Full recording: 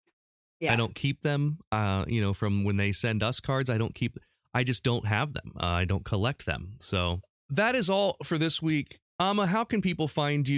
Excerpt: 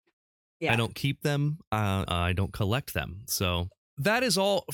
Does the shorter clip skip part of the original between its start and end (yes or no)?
yes